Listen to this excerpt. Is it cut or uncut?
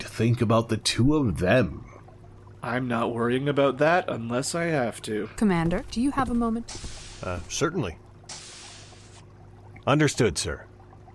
cut